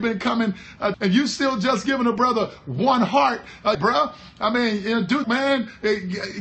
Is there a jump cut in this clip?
yes; 3 cuts; at 0.9 s, 3.7 s, 5.2 s

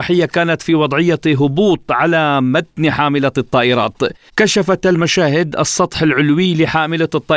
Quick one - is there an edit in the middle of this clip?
yes; 1 cut; at 4.3 s

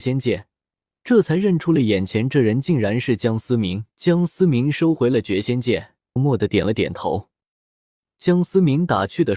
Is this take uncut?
no; 3 cuts; at 3.9 s, 6.2 s, 8.1 s

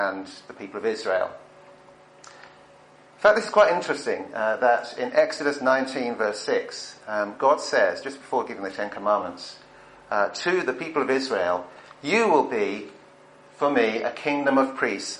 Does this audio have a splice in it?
no; 0 cuts

